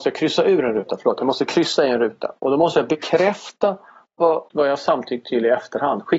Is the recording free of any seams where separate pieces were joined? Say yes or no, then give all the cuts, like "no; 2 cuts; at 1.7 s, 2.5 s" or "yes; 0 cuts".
no; 1 cut; at 4.5 s